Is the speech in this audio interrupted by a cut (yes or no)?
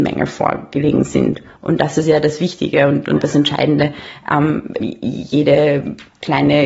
yes